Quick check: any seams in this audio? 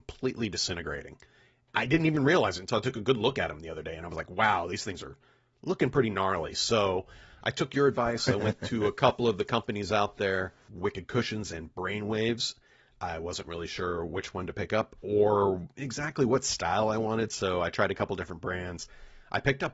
no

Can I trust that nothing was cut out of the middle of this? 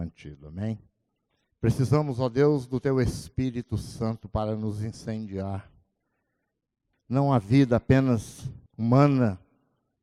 no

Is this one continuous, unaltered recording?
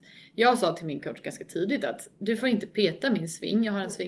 yes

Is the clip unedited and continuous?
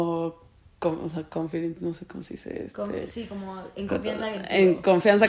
yes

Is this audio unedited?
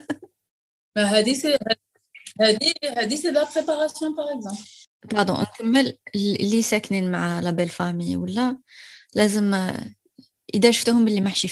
yes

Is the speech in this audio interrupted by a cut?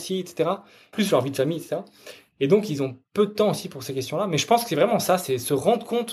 yes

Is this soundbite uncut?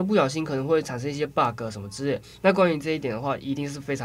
yes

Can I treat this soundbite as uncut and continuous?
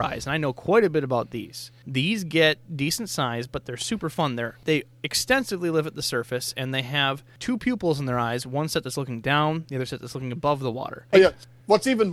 no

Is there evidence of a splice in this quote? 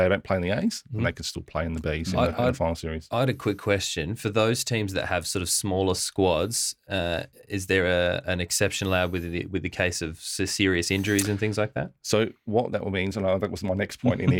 no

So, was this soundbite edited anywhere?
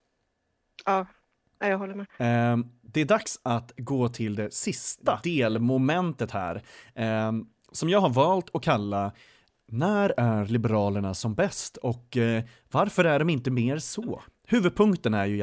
no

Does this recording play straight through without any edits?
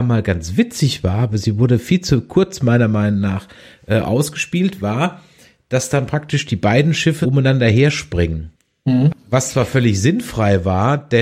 no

